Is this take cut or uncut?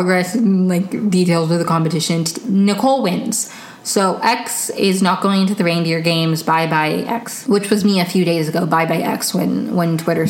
uncut